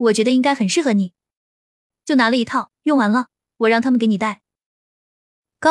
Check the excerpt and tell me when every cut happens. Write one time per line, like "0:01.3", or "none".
0:02.8